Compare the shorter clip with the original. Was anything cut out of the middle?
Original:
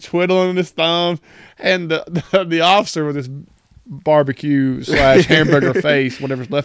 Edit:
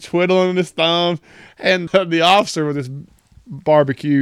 yes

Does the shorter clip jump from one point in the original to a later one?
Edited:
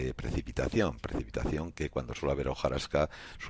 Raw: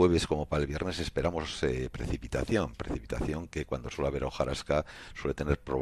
no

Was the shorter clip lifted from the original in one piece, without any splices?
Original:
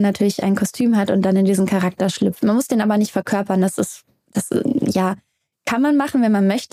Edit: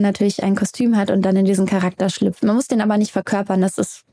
yes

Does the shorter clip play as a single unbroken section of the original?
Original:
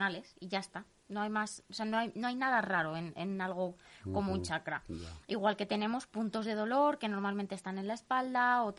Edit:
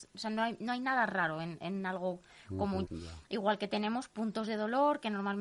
no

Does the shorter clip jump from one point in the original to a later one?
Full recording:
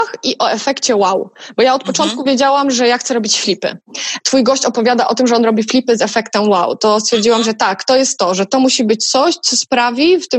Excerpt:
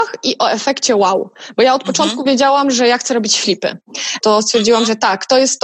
yes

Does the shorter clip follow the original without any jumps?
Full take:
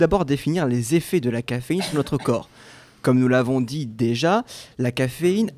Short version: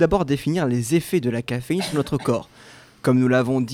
yes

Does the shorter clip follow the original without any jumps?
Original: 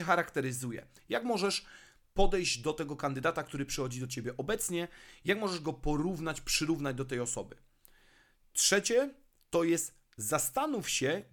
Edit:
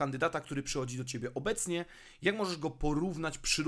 yes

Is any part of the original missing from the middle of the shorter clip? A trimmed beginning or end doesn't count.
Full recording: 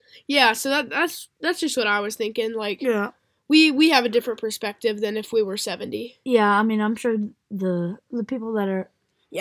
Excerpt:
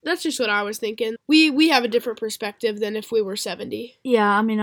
yes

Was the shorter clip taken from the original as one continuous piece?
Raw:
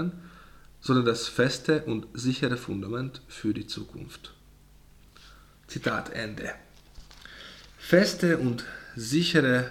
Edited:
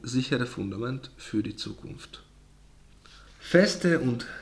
no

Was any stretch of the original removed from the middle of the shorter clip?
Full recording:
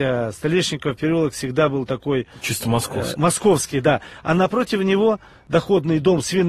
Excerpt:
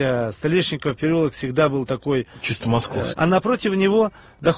yes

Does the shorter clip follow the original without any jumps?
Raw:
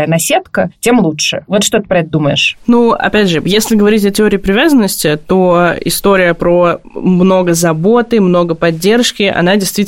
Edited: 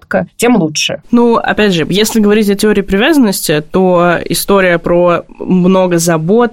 no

